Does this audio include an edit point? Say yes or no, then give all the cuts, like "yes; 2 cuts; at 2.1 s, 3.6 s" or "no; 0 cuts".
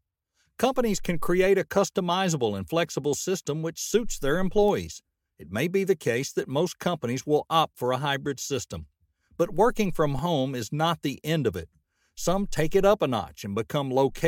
no; 0 cuts